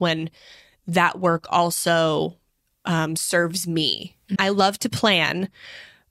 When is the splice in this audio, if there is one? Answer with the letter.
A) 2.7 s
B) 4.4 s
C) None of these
B